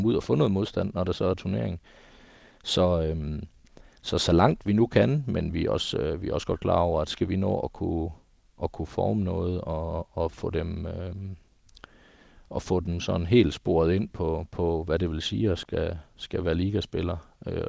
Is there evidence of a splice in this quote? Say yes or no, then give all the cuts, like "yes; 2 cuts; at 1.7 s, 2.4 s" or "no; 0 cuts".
no; 0 cuts